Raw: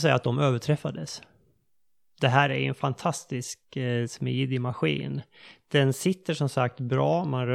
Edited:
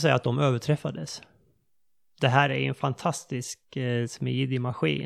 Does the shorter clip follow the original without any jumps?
yes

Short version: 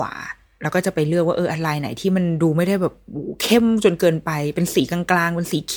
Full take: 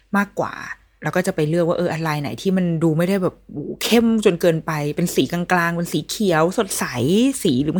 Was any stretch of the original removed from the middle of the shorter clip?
no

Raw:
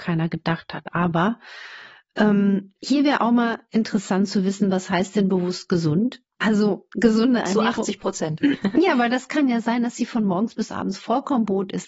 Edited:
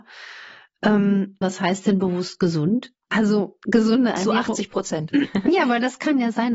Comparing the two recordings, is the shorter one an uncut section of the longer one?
no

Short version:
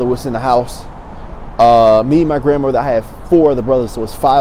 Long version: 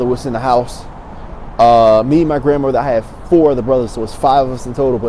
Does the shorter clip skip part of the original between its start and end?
no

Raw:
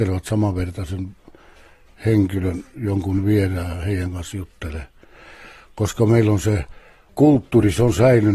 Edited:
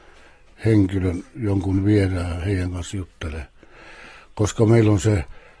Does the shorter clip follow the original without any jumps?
yes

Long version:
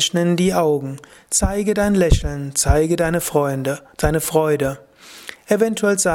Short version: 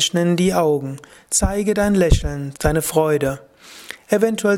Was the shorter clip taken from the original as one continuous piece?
no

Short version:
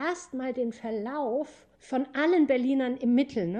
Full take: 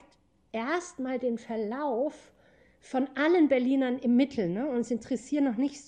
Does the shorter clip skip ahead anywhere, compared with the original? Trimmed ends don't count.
yes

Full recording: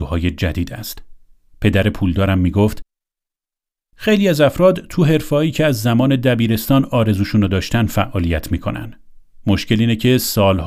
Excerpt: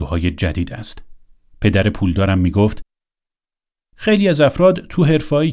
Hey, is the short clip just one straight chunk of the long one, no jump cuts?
yes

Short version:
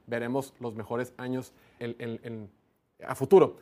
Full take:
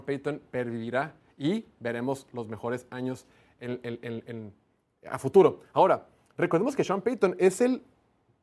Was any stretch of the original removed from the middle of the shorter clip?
yes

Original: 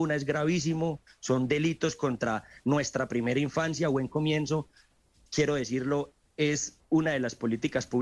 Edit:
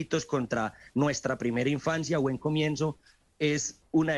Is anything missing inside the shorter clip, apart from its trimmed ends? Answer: yes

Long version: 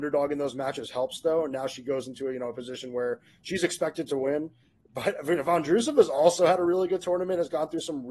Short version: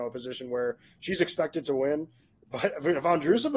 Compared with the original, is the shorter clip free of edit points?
yes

